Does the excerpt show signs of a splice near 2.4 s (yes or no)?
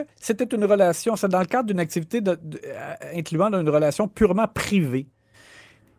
no